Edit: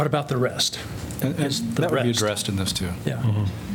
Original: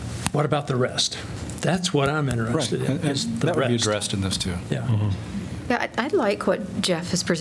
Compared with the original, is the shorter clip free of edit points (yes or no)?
no